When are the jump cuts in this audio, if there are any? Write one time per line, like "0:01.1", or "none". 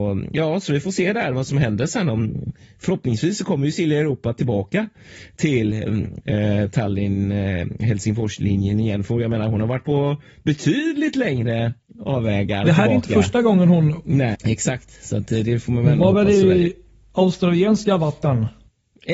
0:12.6
0:14.3